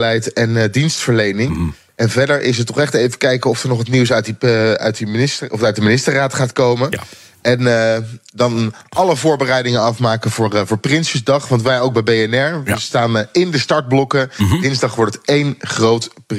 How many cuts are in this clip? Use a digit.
0